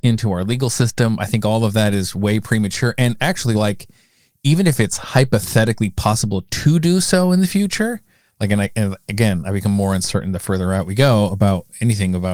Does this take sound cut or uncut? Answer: uncut